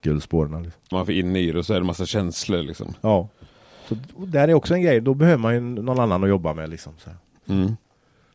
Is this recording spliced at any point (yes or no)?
yes